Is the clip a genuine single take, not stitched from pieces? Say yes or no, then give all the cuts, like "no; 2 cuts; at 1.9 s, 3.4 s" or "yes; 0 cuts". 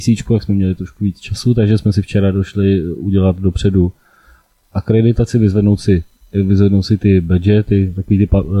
yes; 0 cuts